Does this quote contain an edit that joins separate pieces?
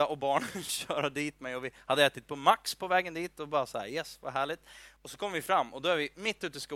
yes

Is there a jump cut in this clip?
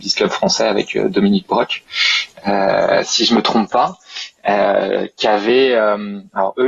no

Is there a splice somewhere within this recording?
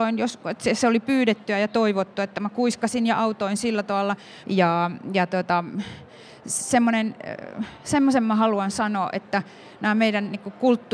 yes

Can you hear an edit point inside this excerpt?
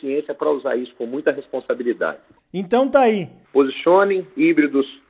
yes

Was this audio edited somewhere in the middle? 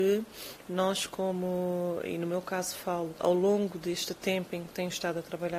yes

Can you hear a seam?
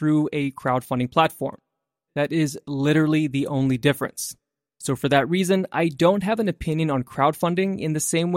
yes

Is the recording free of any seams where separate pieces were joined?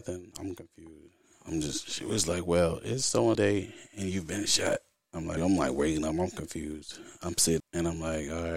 no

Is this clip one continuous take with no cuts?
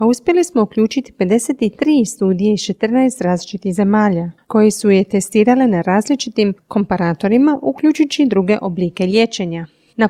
yes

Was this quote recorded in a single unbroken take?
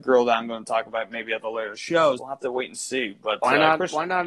no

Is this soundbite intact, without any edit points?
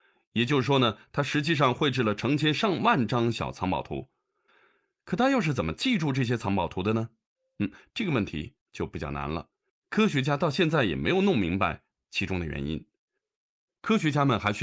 yes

